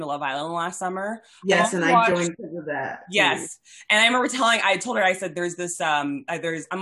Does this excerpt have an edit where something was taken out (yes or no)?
no